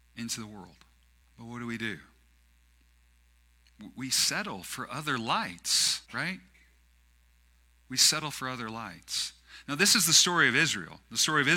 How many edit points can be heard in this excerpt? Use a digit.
2